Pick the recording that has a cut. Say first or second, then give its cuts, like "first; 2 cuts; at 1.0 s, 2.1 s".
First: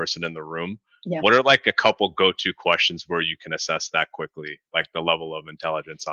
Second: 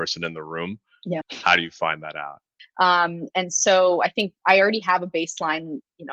second; 2 cuts; at 1.2 s, 2.6 s